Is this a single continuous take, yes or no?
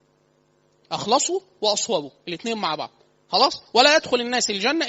yes